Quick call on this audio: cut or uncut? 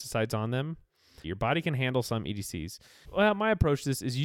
cut